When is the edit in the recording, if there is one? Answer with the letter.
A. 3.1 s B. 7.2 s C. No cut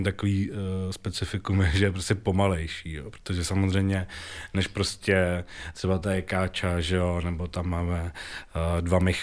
C